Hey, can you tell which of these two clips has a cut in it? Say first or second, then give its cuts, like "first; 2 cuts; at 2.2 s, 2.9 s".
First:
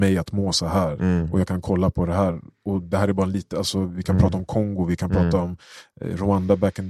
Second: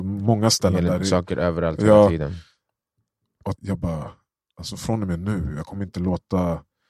second; 1 cut; at 3.6 s